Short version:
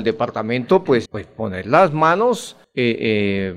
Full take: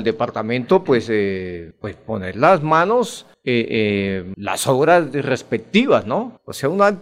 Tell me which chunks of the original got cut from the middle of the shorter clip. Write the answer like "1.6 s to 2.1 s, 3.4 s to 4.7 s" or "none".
1.0 s to 1.7 s